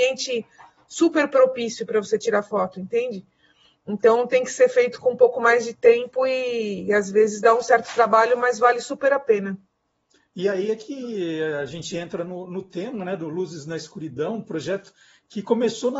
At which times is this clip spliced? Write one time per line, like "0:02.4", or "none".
none